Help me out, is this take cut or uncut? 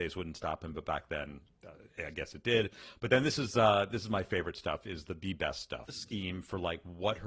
cut